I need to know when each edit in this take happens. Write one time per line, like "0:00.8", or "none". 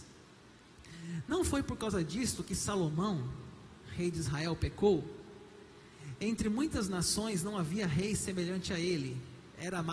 none